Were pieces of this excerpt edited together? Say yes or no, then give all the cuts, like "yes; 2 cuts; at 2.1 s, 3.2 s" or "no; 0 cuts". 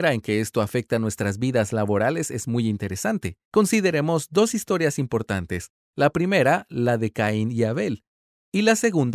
no; 0 cuts